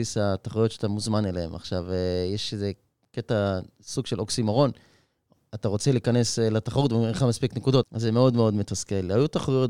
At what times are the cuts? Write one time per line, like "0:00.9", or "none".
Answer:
0:07.8

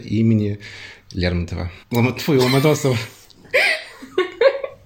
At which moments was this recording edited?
0:01.8

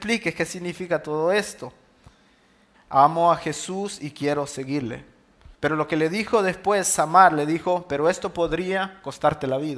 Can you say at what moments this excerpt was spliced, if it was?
0:02.7
0:05.5

